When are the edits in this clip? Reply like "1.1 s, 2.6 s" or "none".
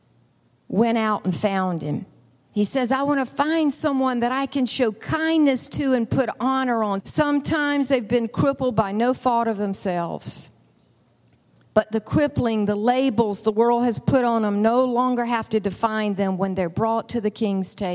7.0 s